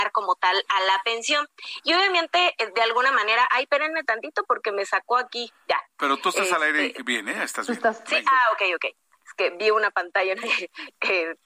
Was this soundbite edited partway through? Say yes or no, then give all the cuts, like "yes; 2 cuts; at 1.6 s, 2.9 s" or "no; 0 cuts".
no; 0 cuts